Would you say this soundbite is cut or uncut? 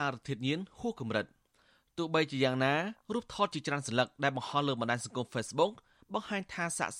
uncut